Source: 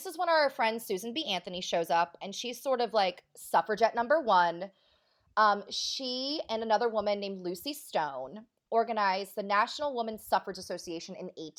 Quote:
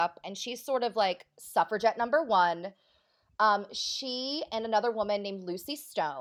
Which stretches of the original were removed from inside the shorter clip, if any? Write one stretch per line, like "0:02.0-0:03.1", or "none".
none